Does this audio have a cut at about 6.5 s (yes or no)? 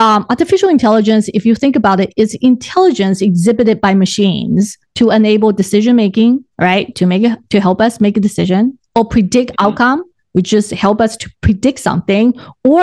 yes